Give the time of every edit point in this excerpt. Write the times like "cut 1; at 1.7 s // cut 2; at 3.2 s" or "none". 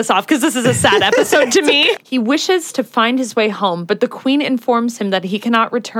cut 1; at 2.0 s